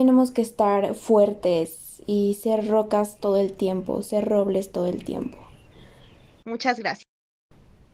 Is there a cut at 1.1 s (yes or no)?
no